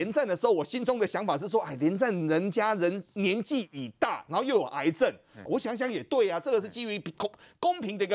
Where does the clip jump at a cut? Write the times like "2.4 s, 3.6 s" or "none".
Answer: 5.5 s

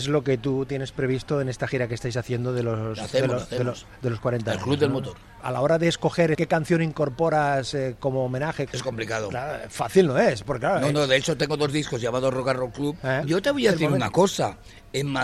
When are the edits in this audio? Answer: 13.2 s

